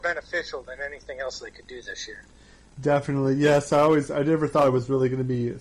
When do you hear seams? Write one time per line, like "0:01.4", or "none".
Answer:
none